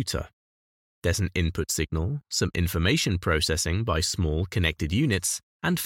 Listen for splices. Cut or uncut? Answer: uncut